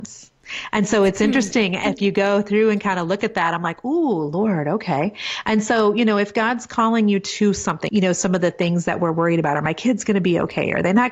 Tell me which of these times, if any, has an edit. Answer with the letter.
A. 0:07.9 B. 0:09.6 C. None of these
A